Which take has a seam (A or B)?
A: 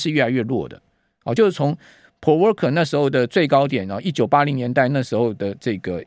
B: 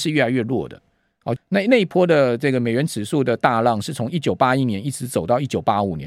B